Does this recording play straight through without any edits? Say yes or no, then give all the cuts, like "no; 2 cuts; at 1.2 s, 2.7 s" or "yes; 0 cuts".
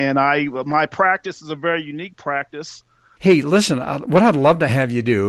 no; 1 cut; at 3.2 s